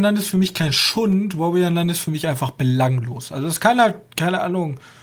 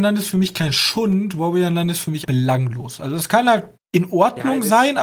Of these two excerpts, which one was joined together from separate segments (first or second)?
second